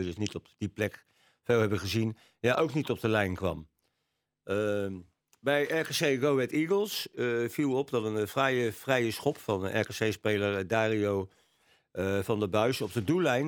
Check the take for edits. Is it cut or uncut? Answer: uncut